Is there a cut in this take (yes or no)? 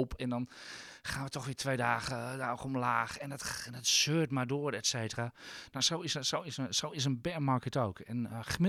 no